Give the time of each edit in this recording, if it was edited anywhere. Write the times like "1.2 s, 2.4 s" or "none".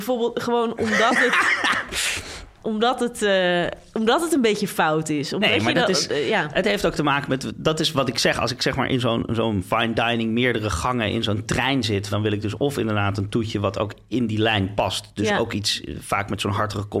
12.1 s